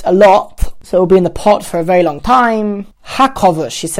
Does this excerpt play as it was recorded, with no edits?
no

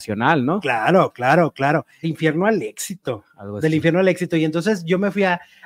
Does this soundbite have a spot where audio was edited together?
yes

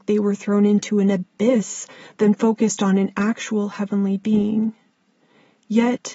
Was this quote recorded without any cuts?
yes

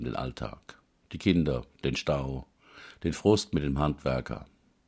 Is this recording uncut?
no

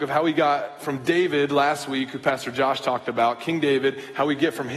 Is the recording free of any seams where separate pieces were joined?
yes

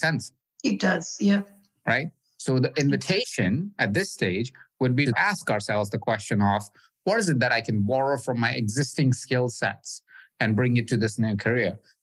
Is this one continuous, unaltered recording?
yes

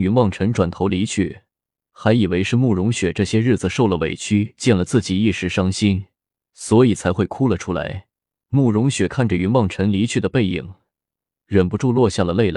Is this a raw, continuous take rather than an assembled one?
no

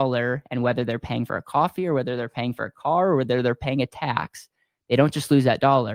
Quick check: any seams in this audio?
no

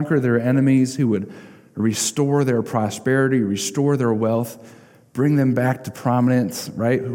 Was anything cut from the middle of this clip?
no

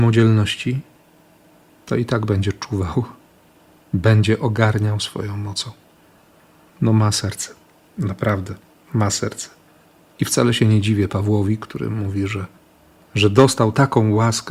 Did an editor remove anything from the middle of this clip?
no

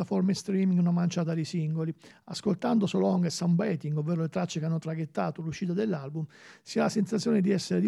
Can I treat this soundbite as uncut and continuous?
yes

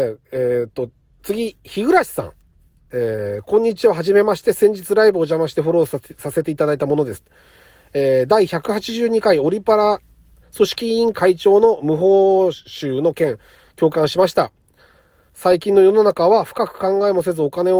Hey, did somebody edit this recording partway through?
yes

